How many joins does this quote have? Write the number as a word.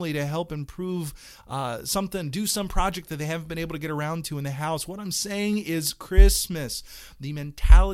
zero